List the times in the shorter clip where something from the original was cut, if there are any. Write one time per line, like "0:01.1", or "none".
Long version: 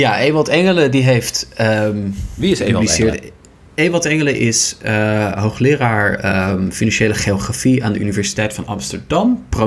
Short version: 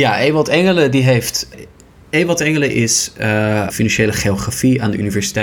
0:01.5
0:03.7

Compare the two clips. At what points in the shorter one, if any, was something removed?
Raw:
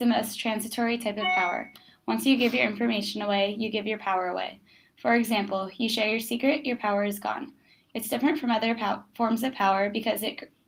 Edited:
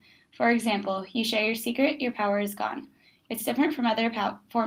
none

